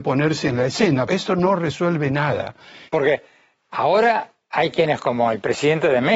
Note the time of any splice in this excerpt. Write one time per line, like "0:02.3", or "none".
0:01.1
0:02.9